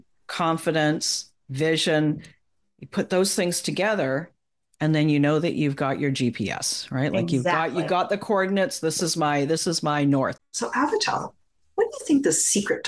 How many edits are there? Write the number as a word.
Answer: one